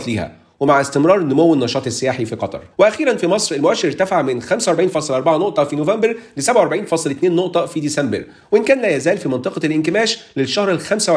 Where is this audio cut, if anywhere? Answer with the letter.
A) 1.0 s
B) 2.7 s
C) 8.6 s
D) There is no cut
B